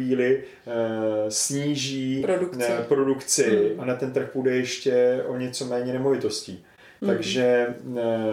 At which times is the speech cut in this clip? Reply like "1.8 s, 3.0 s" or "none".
none